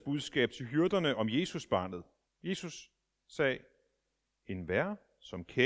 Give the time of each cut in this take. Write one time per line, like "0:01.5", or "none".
0:02.3